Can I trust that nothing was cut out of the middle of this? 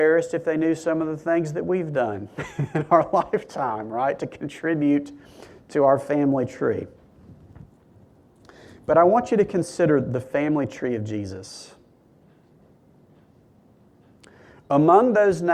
yes; 0 cuts

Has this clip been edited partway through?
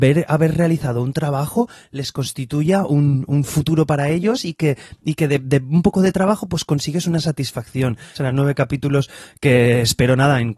yes; 1 cut; at 8.2 s

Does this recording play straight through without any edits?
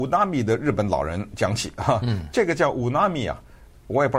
yes; 0 cuts

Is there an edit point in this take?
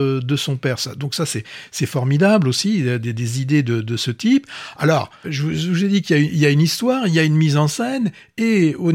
yes; 1 cut; at 5.2 s

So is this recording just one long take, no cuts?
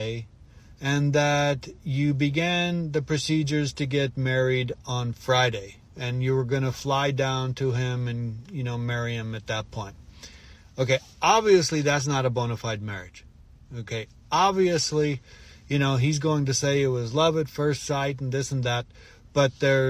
yes; 0 cuts

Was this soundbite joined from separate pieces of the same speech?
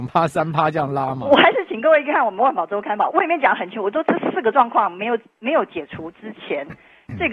yes; 1 cut; at 3.1 s

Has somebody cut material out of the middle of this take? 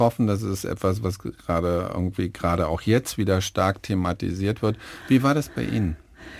no; 0 cuts

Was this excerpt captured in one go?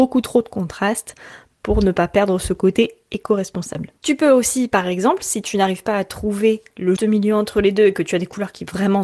no; 2 cuts; at 4.0 s, 7.0 s

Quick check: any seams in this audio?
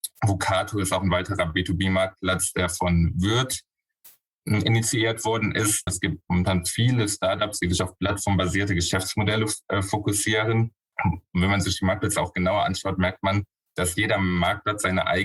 yes; 2 cuts; at 5.9 s, 10.9 s

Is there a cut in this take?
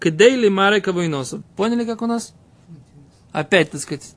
yes; 1 cut; at 1.4 s

